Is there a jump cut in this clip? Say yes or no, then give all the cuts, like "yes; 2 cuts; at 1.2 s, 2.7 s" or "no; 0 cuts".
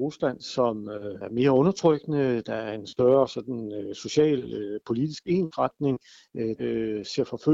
yes; 1 cut; at 6.6 s